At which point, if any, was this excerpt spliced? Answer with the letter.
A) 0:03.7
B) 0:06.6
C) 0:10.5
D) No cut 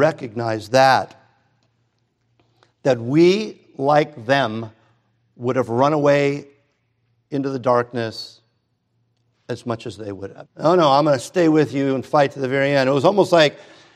C